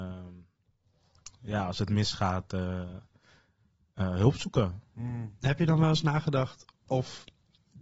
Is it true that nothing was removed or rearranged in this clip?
yes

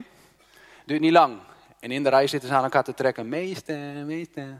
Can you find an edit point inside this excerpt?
no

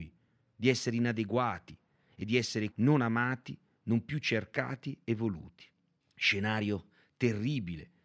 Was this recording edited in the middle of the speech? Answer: yes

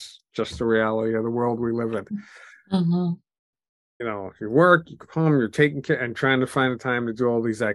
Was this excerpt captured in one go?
no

